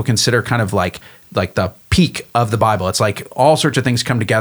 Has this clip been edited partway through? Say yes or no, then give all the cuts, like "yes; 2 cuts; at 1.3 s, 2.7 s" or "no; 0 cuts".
no; 0 cuts